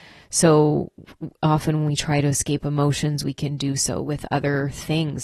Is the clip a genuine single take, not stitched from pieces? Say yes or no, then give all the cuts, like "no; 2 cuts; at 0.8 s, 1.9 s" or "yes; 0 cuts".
yes; 0 cuts